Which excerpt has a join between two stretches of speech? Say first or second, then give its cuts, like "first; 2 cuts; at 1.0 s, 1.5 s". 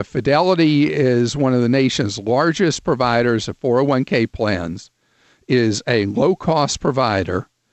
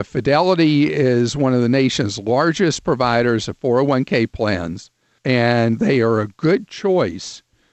second; 1 cut; at 5.2 s